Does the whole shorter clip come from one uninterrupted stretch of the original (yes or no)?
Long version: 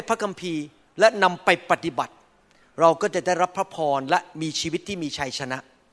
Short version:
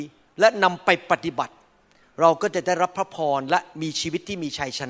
yes